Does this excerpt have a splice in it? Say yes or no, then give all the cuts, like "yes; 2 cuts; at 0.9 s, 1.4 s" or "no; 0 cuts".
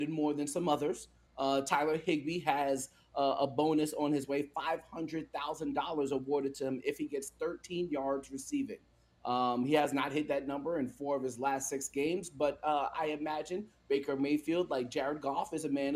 no; 0 cuts